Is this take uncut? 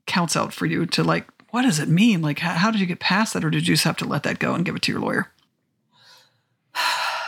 yes; 0 cuts

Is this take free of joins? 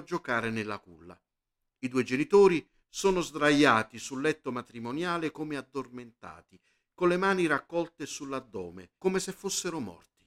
no; 1 cut; at 9.0 s

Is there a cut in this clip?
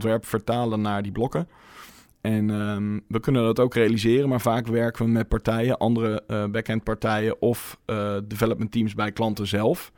no; 0 cuts

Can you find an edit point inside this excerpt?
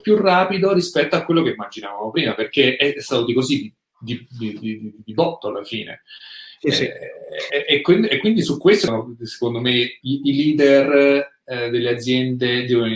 yes; 1 cut; at 10.0 s

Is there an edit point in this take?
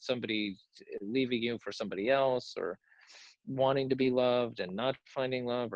no; 0 cuts

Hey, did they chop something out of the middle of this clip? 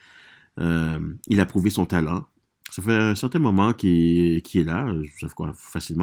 no; 0 cuts

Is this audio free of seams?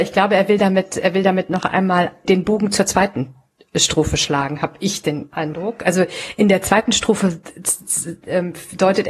no; 1 cut; at 2.2 s

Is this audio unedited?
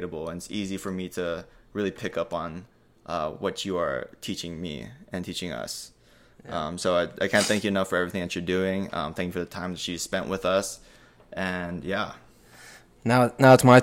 yes; 0 cuts

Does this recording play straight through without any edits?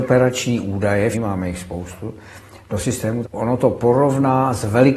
no; 2 cuts; at 1.1 s, 3.2 s

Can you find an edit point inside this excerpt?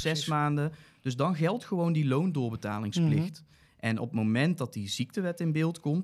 no; 0 cuts

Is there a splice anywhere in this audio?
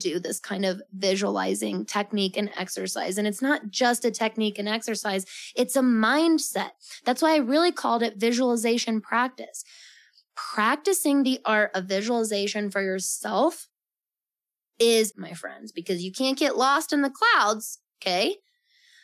yes; 1 cut; at 15.1 s

